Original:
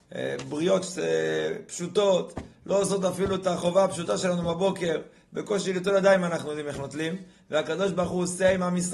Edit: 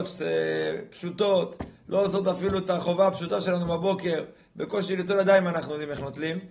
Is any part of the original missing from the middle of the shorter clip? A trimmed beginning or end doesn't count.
no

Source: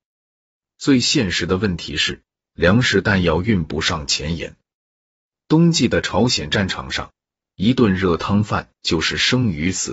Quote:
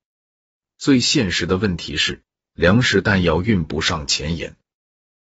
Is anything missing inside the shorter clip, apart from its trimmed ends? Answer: no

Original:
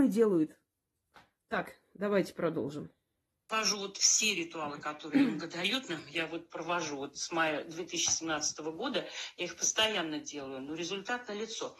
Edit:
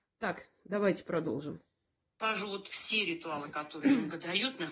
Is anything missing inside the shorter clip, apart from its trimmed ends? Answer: no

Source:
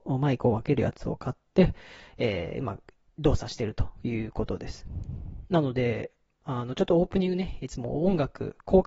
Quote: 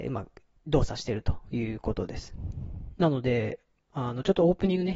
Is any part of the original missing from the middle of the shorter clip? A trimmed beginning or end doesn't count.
no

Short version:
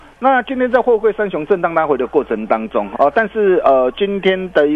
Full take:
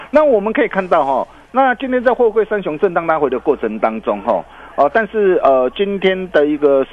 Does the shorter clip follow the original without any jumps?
no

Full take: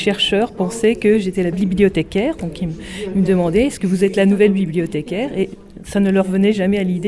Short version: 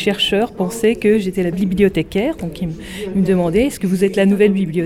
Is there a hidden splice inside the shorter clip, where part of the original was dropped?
no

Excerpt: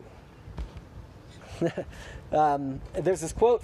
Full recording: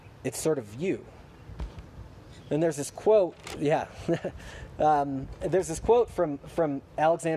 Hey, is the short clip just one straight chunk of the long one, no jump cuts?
no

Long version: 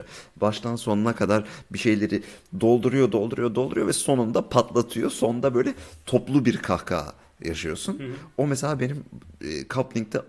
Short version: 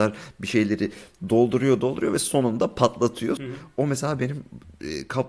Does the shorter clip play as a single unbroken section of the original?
no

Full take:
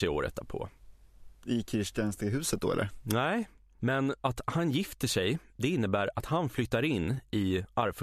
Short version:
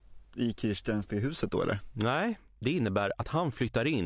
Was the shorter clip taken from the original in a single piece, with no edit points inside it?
no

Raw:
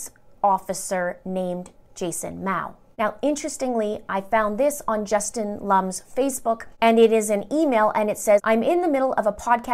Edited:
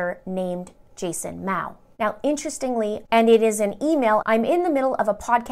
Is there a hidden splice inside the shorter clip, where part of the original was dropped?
yes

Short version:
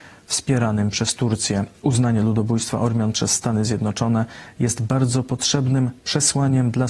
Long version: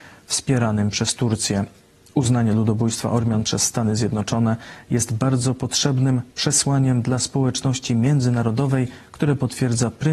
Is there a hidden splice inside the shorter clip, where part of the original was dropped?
yes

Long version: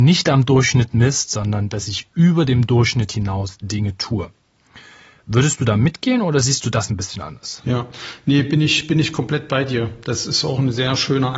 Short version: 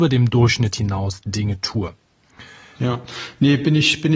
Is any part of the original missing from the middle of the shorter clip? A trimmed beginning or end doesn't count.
yes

